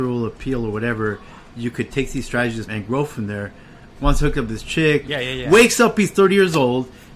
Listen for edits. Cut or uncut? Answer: cut